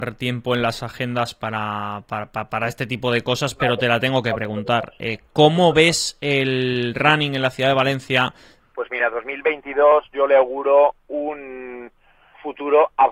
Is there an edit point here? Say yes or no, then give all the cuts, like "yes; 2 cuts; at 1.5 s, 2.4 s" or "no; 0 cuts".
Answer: yes; 1 cut; at 8.6 s